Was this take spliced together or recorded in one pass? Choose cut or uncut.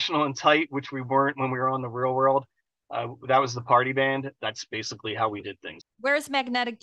cut